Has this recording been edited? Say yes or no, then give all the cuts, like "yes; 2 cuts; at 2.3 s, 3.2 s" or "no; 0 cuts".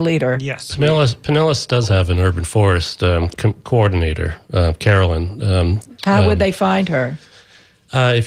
no; 0 cuts